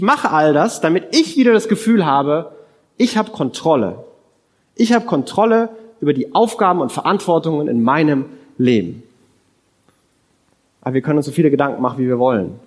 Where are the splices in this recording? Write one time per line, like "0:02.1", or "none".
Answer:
none